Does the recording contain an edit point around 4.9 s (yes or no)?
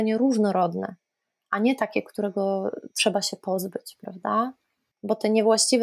yes